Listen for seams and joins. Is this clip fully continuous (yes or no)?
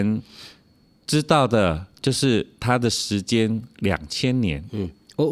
yes